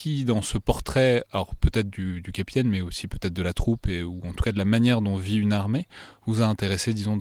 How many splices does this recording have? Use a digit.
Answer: 0